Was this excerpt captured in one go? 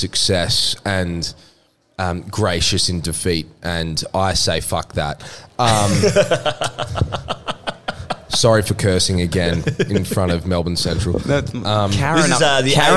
yes; 0 cuts

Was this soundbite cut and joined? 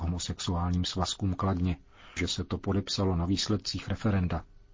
yes; 1 cut; at 2.2 s

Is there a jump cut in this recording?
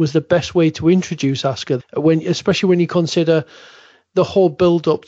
yes; 1 cut; at 1.8 s

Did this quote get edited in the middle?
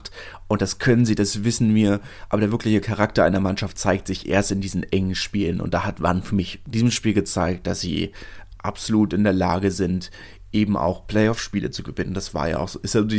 no; 0 cuts

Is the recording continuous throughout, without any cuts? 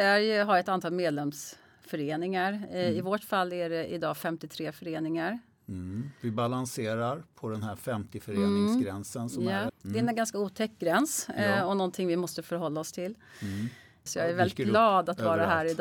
no; 2 cuts; at 9.7 s, 14.1 s

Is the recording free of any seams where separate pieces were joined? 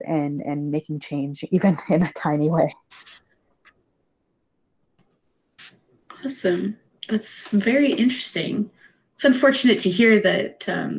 yes; 0 cuts

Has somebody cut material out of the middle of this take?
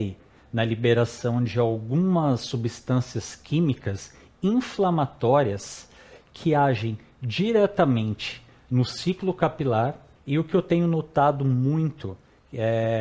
yes; 1 cut; at 10.2 s

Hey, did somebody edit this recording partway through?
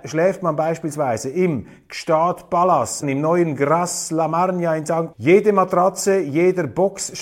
yes; 2 cuts; at 3.0 s, 5.1 s

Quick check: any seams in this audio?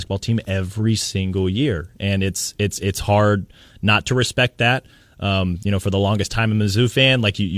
no; 0 cuts

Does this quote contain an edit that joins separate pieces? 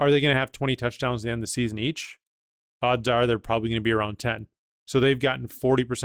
yes; 1 cut; at 2.7 s

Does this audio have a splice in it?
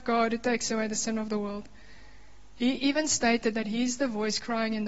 no; 0 cuts

